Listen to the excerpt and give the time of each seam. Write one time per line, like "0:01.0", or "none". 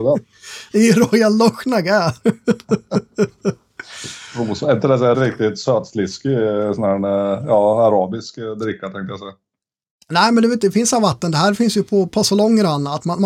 0:05.1